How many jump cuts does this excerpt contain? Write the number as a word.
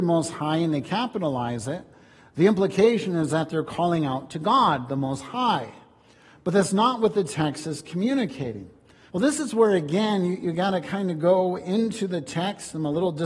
one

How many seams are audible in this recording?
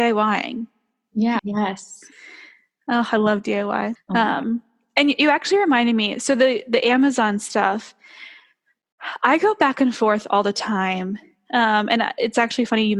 two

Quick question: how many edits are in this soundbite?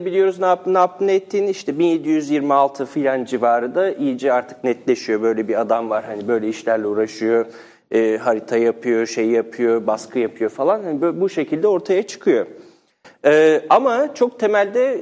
zero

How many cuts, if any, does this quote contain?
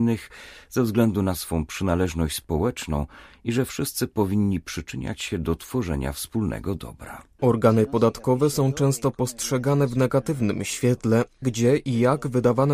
two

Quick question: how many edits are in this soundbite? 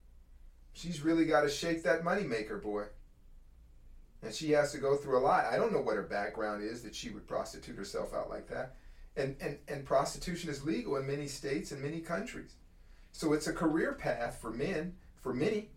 zero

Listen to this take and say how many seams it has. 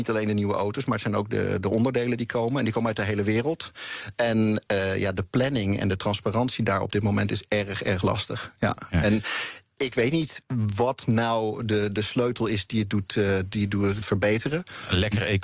one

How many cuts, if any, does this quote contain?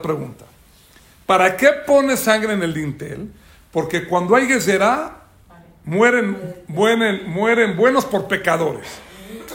zero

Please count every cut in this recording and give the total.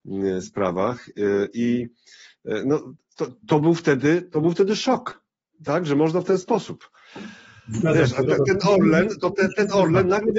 one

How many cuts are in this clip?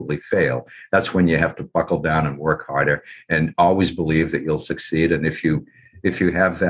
zero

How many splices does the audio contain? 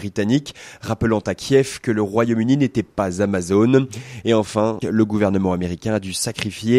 one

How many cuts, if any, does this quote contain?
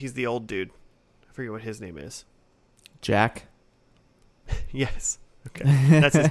zero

